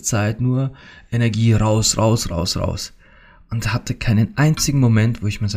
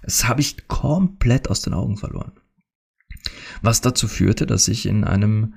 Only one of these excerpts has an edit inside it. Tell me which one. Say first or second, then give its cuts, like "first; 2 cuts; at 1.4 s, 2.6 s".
first; 1 cut; at 2.3 s